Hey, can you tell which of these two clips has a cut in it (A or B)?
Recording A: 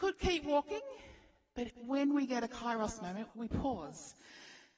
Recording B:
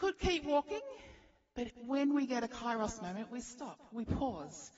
A